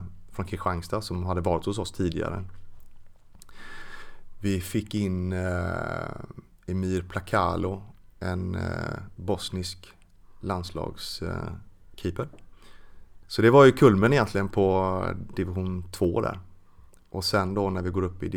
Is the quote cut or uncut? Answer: cut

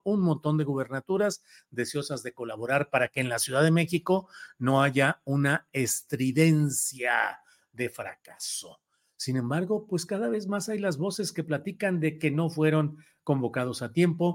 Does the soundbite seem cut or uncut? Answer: uncut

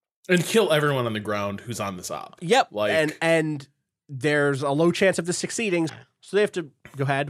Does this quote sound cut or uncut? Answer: cut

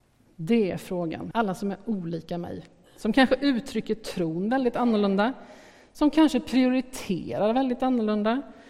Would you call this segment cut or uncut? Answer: cut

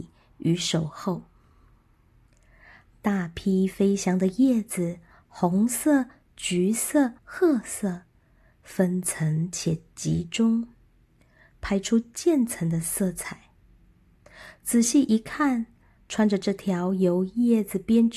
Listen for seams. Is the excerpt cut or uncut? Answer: cut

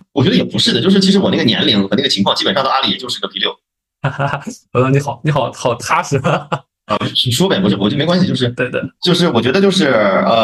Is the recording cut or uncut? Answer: uncut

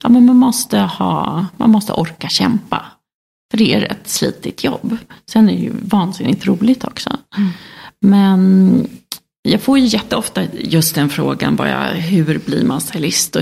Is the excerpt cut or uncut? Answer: uncut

